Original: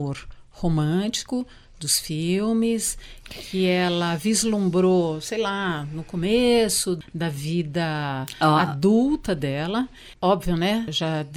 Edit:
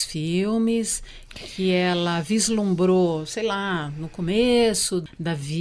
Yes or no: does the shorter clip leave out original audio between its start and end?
no